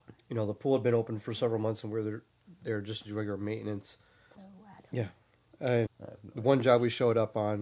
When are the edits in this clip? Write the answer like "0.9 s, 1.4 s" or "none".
4.3 s, 5.9 s